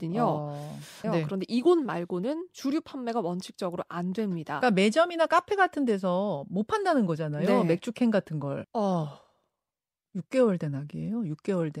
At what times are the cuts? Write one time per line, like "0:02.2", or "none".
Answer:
0:01.0
0:08.6